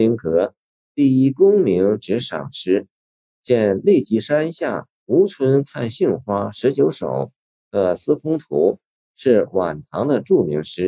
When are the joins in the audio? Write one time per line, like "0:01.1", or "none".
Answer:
none